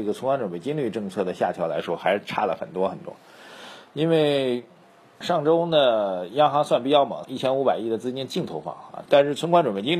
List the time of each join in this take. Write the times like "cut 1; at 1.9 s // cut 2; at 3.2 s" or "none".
cut 1; at 5.2 s // cut 2; at 7.2 s // cut 3; at 9.1 s

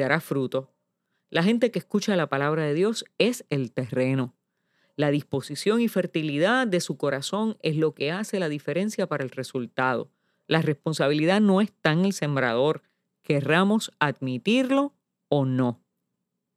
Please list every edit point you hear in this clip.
none

